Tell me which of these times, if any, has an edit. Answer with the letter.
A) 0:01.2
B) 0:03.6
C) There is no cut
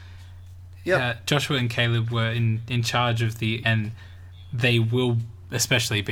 B